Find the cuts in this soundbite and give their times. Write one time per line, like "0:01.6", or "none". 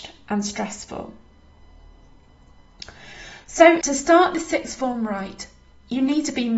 0:03.8